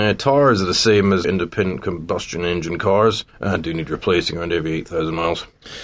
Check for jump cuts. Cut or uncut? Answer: cut